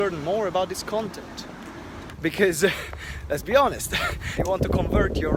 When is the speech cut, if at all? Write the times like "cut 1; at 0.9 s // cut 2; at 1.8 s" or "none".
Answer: cut 1; at 2.1 s // cut 2; at 4.4 s